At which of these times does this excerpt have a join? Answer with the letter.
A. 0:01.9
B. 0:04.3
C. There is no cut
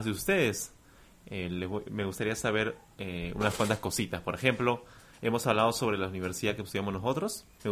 C